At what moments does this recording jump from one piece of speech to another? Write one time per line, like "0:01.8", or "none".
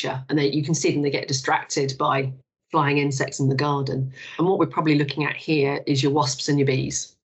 none